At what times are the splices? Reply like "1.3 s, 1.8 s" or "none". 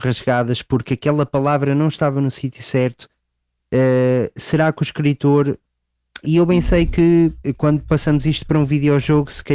6.2 s

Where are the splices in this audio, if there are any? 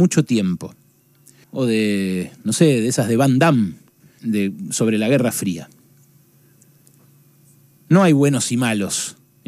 1.4 s, 4.2 s

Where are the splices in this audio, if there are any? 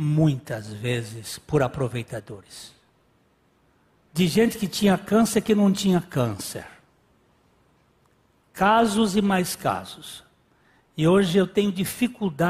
4.1 s

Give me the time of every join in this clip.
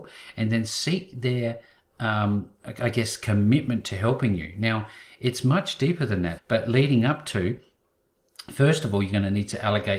6.4 s

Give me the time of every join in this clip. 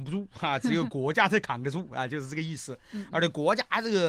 none

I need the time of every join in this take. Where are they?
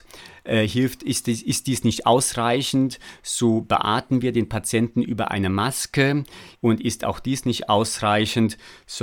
6.5 s

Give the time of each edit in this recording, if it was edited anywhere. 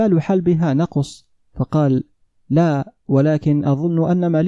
1.5 s

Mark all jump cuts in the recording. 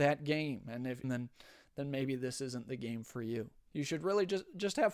1.0 s

